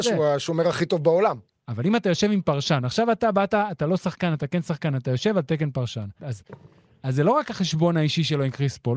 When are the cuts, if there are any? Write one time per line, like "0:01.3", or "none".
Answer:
0:01.5
0:06.2

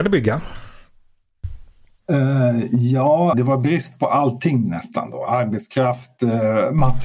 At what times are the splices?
0:03.3

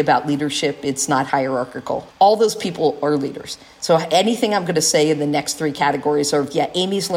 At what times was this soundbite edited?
0:02.1

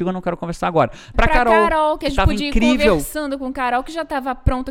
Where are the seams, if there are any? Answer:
0:01.1

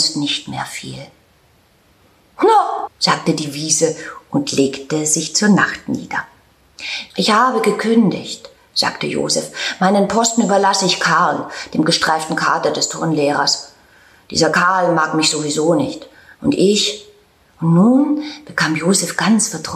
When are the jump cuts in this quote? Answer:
0:02.9
0:07.1

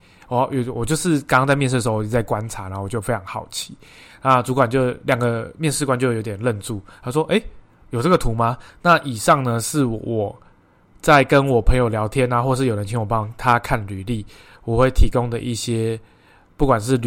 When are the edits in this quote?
0:08.7

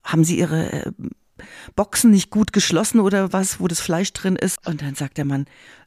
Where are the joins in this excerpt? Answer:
0:04.6

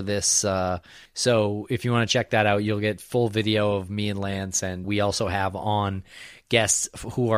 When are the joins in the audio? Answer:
0:01.1
0:04.8

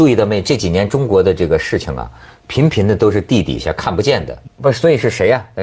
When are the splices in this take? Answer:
0:04.5

